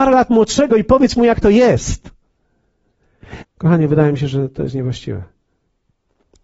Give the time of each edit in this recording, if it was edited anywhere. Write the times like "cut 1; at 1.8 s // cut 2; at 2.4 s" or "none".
cut 1; at 3.4 s

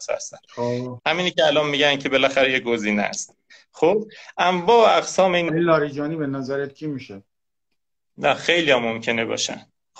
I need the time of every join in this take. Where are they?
cut 1; at 1.0 s // cut 2; at 5.5 s

